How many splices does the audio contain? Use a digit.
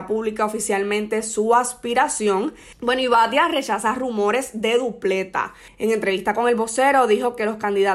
2